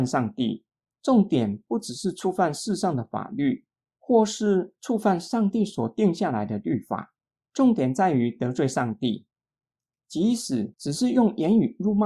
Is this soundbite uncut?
no; 1 cut; at 0.9 s

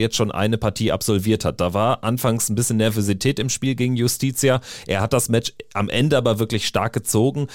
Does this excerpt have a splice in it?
no; 0 cuts

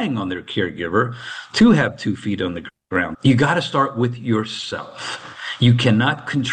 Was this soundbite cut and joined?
yes; 1 cut; at 3.1 s

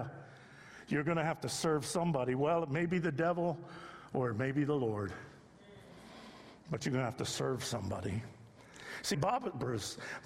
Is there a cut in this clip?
yes; 1 cut; at 9.1 s

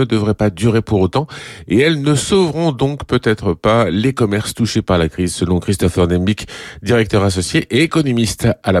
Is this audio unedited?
yes; 0 cuts

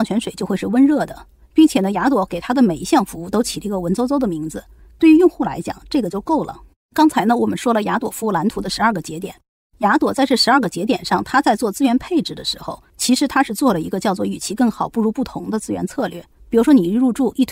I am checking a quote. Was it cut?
yes; 1 cut; at 4.9 s

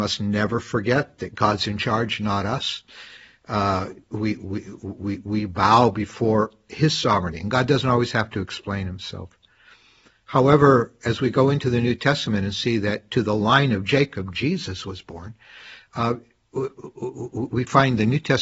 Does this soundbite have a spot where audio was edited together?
no; 0 cuts

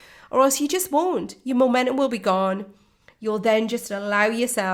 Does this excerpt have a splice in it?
no; 0 cuts

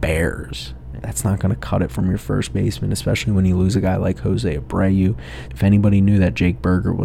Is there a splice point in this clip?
yes; 2 cuts; at 1.0 s, 5.5 s

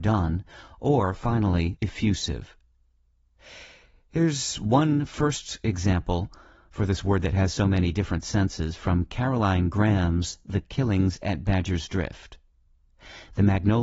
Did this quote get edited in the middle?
yes; 1 cut; at 1.8 s

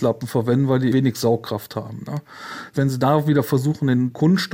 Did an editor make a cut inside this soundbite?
yes; 1 cut; at 0.9 s

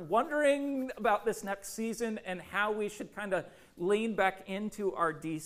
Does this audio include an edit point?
no; 0 cuts

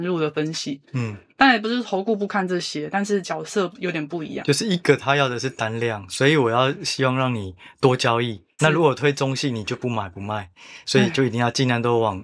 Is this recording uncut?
no; 1 cut; at 8.6 s

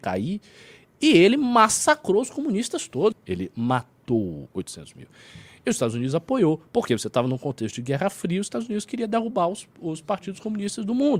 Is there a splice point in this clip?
yes; 1 cut; at 3.1 s

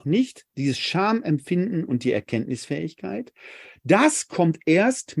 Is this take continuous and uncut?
yes; 0 cuts

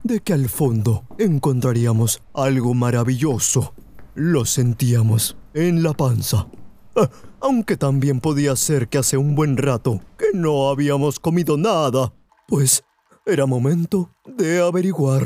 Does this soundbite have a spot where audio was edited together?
yes; 1 cut; at 12.3 s

